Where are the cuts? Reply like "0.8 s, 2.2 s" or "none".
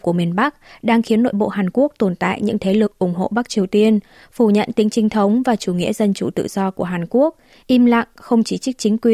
none